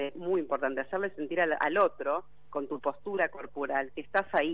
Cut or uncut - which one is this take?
uncut